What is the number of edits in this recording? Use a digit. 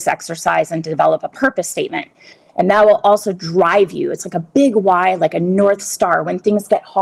0